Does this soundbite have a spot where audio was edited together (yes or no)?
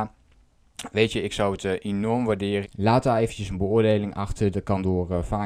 yes